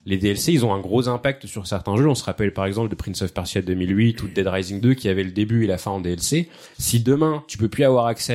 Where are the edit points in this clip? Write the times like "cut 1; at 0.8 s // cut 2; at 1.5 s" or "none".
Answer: none